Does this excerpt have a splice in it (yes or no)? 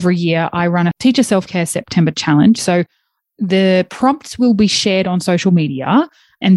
yes